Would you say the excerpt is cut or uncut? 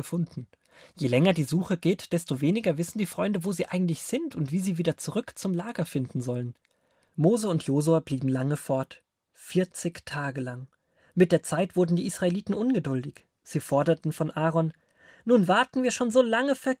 cut